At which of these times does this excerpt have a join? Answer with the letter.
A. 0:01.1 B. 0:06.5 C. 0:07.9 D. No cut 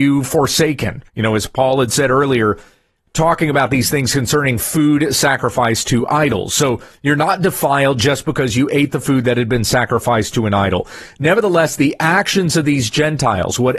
A